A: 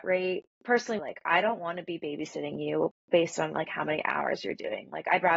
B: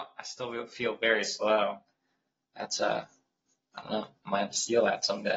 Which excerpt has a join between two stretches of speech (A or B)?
A